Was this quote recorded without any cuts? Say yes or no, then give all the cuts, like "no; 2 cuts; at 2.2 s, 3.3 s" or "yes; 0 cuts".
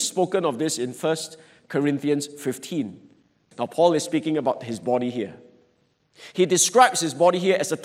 no; 1 cut; at 3.5 s